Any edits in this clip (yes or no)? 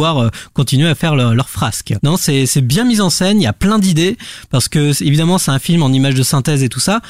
yes